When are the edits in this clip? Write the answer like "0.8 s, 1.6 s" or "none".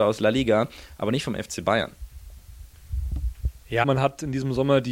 3.8 s

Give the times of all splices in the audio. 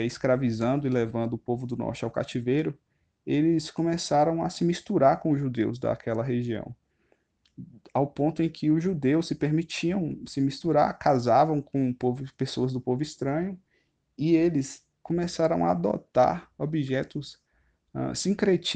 none

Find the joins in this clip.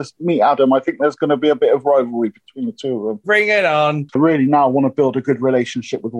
3.2 s

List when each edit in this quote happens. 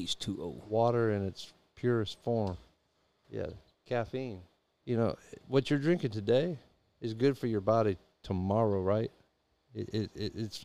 3.2 s, 4.8 s

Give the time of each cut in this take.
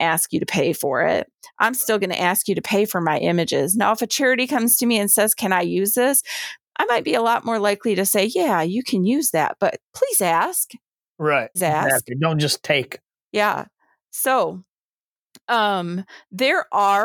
11.6 s, 13.1 s

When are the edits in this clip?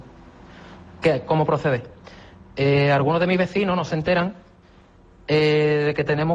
none

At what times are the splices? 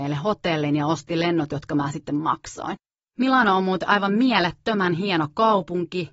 3.1 s

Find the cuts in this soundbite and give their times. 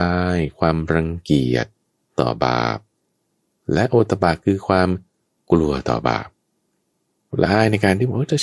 none

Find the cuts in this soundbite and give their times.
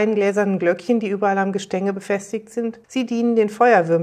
2.8 s

